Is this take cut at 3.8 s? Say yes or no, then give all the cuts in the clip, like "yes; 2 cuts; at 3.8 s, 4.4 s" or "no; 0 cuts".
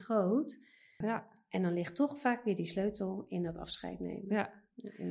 no; 1 cut; at 1.0 s